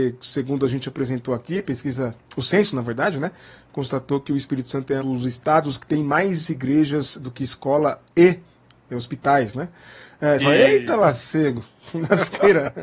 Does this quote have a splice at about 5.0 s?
yes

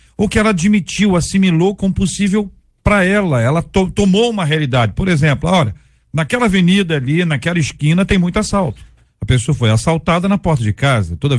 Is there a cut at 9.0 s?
yes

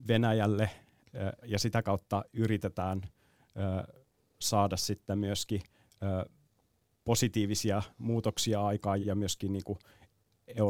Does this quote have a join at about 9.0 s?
yes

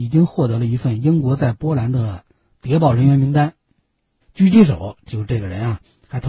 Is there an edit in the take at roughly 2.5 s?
no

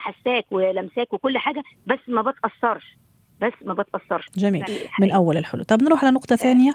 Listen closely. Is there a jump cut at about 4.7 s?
yes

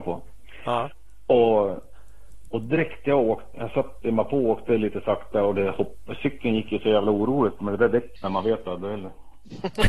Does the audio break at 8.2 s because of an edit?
yes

